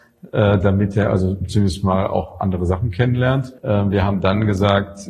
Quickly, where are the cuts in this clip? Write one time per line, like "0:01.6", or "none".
0:03.6